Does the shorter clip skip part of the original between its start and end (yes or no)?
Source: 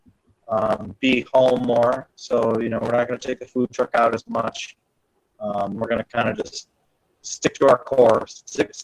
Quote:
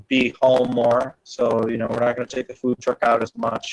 no